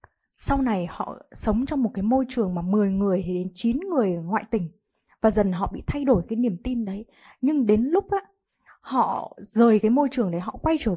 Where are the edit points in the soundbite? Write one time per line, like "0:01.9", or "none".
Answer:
0:05.3